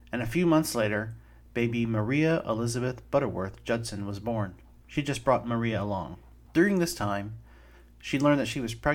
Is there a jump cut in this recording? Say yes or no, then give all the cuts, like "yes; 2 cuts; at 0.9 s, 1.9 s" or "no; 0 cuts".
yes; 2 cuts; at 4.8 s, 6.4 s